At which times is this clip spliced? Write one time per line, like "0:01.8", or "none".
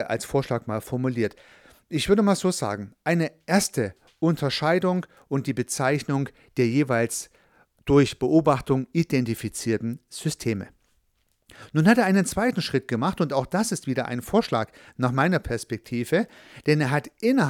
none